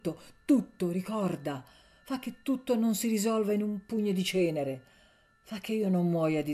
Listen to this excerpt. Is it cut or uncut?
uncut